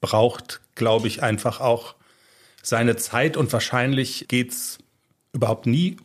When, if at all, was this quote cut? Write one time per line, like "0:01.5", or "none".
none